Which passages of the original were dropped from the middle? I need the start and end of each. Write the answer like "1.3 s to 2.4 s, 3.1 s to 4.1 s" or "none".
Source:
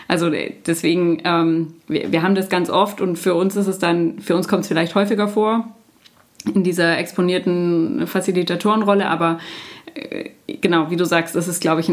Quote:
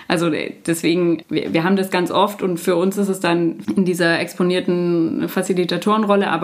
1.2 s to 1.8 s, 4.2 s to 6.4 s